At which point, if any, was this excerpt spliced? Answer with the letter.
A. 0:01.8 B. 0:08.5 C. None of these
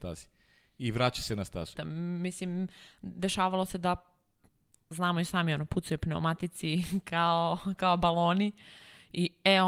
A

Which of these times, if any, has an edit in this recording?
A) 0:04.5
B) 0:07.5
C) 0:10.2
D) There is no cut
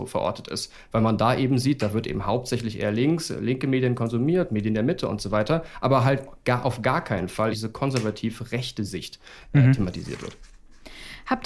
B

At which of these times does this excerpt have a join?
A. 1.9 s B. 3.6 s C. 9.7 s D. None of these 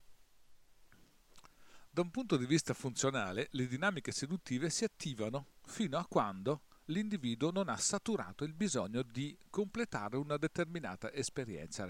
D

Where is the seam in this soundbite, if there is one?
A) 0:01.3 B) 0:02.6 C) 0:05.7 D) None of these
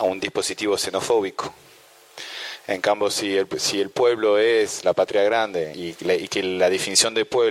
C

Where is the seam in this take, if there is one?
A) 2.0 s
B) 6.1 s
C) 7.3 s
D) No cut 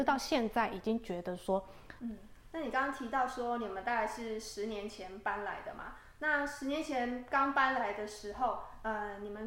A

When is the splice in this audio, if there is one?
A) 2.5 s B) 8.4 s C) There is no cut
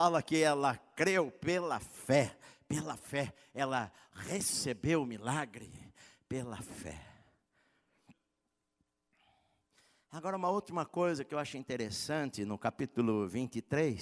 C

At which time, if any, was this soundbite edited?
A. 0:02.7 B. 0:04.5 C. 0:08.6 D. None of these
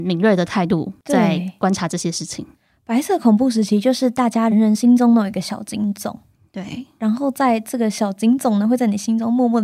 B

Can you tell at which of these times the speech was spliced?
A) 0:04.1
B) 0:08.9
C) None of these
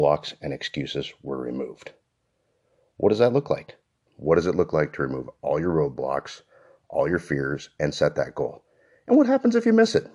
A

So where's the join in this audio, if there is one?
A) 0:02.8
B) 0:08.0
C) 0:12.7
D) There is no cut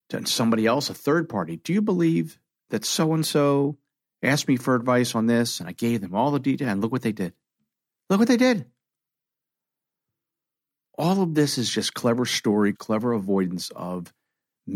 C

